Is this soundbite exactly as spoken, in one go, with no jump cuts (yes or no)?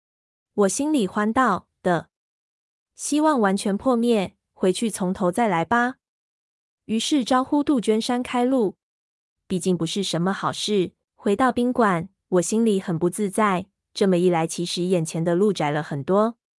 no